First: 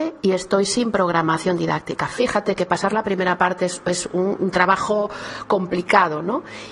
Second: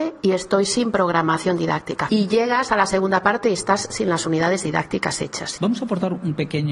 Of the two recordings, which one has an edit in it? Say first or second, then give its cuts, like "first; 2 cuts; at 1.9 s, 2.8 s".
second; 2 cuts; at 2.1 s, 5.6 s